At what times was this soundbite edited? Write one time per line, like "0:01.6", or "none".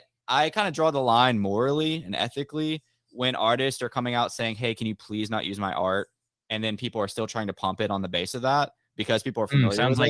none